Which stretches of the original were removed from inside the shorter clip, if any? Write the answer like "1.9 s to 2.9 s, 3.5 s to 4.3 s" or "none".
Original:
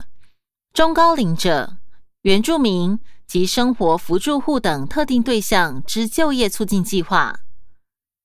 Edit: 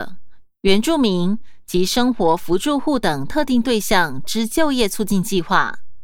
none